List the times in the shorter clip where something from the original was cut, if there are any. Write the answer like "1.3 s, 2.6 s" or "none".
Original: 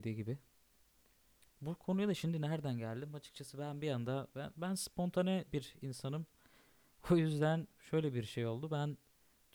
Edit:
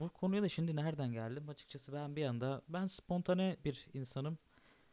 2.7 s